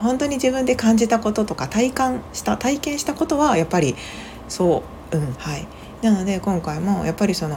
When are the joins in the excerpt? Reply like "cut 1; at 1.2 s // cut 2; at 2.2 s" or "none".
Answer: cut 1; at 5.3 s